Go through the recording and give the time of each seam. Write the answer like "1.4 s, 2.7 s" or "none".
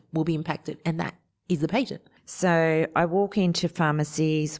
2.2 s